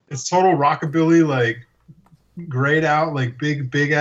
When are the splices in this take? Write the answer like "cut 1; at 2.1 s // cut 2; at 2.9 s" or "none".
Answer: none